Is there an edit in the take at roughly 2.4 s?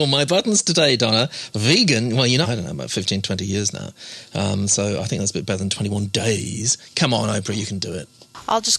yes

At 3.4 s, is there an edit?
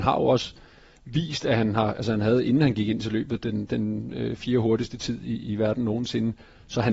no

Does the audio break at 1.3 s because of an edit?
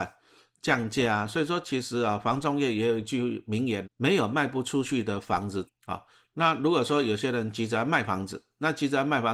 no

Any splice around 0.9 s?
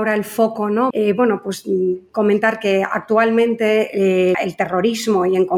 yes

